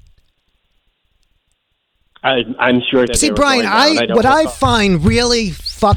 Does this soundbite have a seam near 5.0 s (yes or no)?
no